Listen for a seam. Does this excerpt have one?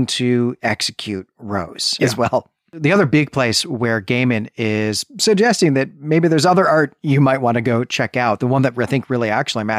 yes; 1 cut; at 2.0 s

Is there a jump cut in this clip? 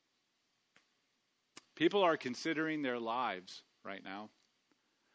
no; 0 cuts

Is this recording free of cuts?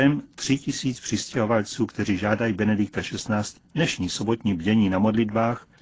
no; 1 cut; at 3.6 s

